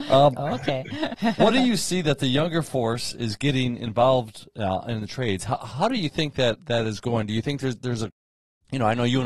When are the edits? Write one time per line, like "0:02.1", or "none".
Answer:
none